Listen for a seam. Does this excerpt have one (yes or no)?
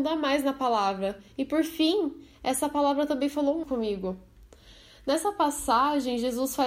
yes